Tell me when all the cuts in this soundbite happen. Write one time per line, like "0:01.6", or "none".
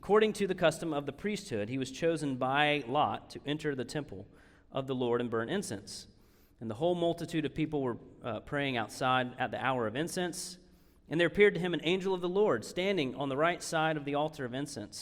none